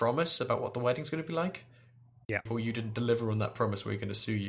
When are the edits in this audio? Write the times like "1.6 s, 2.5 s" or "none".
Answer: 2.5 s